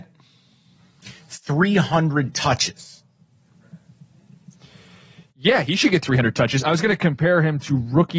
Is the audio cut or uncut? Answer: uncut